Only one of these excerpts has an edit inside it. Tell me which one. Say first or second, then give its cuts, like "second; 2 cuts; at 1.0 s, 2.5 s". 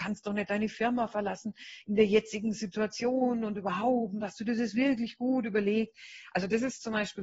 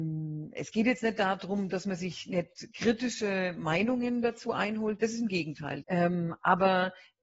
second; 1 cut; at 5.8 s